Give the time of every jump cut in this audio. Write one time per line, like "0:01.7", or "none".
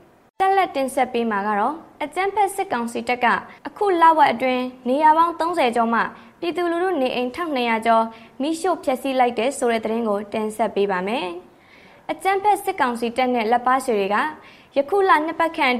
0:03.6